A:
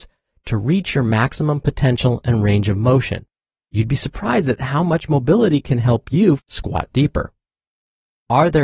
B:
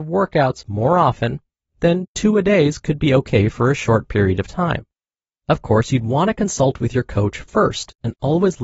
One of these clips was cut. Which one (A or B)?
A